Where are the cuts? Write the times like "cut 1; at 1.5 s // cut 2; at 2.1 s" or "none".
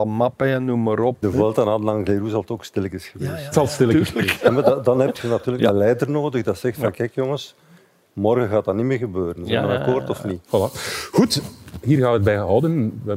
cut 1; at 1.2 s // cut 2; at 10.4 s